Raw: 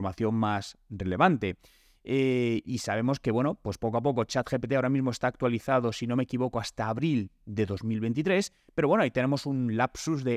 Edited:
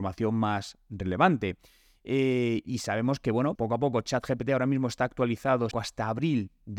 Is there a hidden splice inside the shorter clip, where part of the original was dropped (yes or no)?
yes